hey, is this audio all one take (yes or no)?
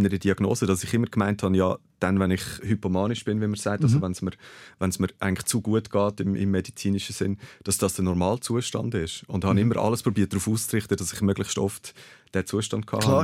yes